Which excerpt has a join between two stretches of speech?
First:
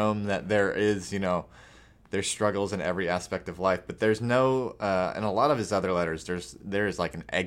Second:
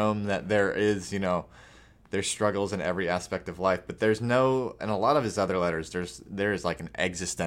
second; 1 cut; at 4.8 s

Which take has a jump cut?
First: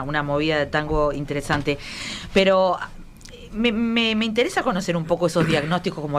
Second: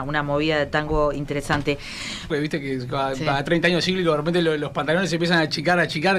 second; 1 cut; at 2.3 s

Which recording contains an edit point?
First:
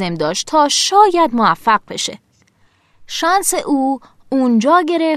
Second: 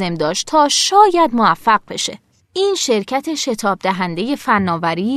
second; 1 cut; at 2.4 s

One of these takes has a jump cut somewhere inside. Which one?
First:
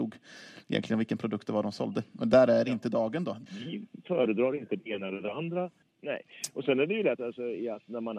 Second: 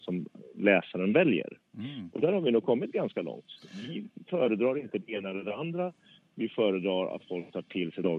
first; 3 cuts; at 3.5 s, 5.8 s, 7.2 s

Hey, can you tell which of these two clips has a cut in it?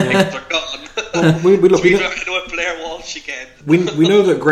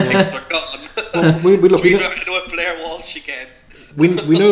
first; 1 cut; at 3.6 s

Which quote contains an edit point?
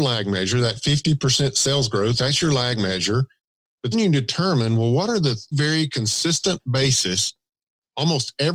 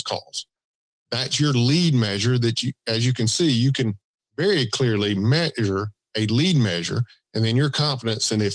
first; 2 cuts; at 3.9 s, 5.5 s

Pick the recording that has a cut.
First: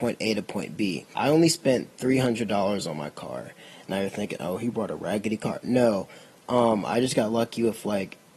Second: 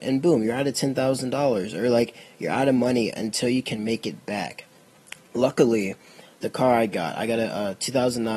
first; 1 cut; at 1.1 s

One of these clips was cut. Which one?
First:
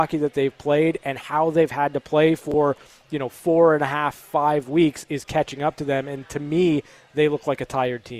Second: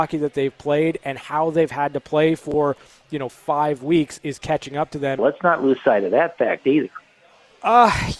second; 2 cuts; at 3.3 s, 5.2 s

